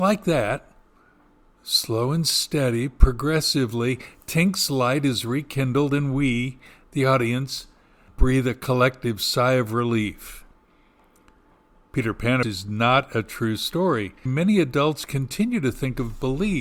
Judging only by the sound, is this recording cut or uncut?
cut